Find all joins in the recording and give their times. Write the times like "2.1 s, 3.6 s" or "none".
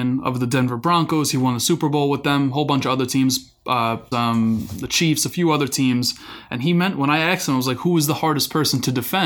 4.1 s